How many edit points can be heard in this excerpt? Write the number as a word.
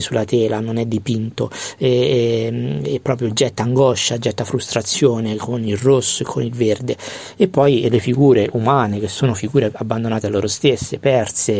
zero